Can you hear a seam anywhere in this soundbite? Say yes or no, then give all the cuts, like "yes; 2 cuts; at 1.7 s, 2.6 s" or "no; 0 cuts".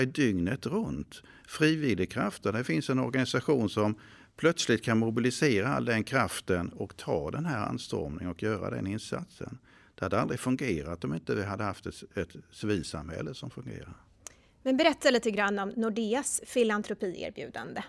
no; 0 cuts